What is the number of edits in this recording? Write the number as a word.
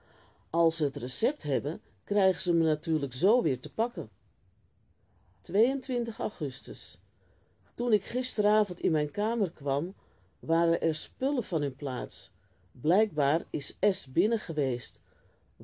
zero